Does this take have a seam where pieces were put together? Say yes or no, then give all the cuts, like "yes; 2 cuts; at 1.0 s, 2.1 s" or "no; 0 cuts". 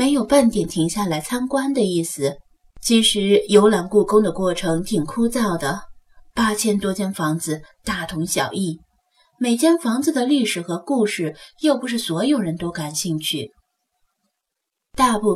yes; 1 cut; at 2.7 s